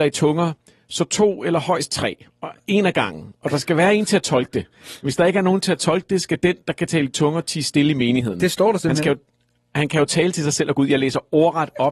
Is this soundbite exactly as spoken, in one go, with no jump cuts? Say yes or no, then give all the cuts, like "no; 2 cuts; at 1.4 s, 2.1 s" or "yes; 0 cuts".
yes; 0 cuts